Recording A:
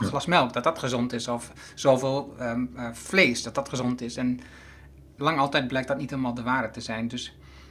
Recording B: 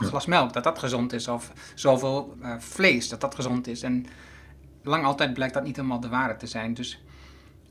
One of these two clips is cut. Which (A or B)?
B